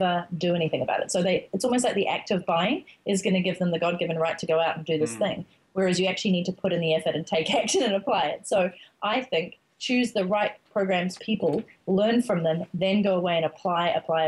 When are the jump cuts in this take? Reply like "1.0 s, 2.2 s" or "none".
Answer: 11.2 s